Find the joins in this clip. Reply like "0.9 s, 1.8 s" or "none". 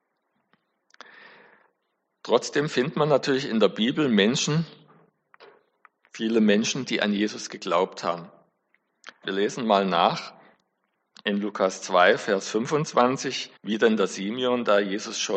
9.2 s, 13.6 s